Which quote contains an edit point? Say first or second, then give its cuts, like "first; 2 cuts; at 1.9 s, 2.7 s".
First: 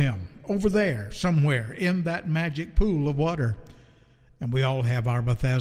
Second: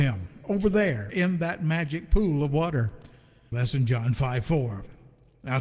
second; 2 cuts; at 1.1 s, 3.5 s